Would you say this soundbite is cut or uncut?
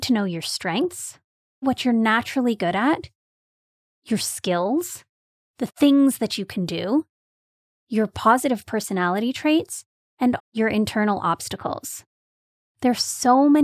cut